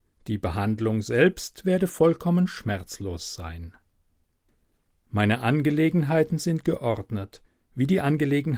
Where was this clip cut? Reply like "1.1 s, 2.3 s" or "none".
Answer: none